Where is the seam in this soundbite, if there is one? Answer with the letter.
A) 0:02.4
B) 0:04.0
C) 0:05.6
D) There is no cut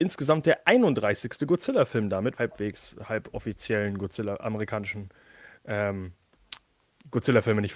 A